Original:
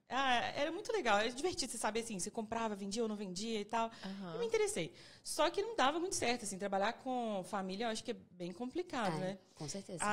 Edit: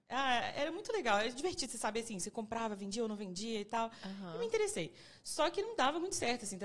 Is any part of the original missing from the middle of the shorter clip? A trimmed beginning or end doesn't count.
no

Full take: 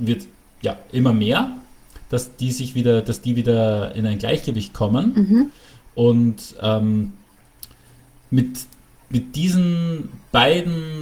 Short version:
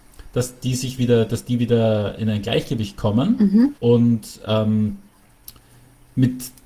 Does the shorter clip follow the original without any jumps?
no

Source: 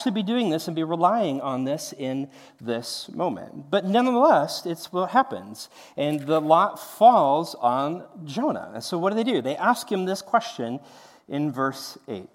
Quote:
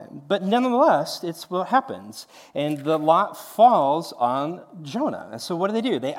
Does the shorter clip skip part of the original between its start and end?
no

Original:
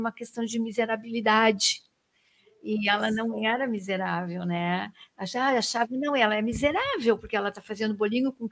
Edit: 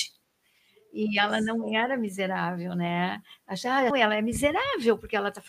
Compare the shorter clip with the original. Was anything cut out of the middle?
yes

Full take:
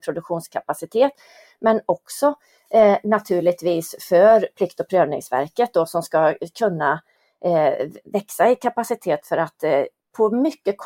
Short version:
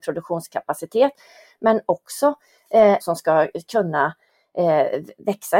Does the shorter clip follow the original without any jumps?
no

